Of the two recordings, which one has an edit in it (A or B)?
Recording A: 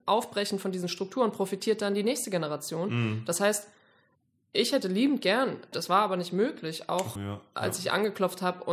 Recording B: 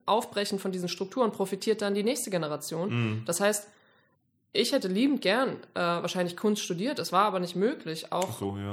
A